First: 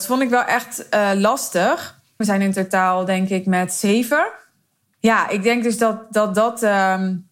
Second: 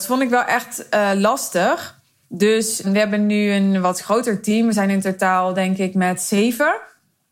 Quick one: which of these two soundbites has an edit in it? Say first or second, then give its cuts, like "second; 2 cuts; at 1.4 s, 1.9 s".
first; 1 cut; at 2.2 s